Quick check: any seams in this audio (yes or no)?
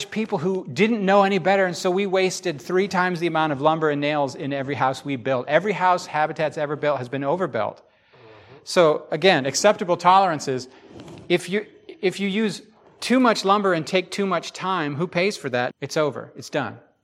yes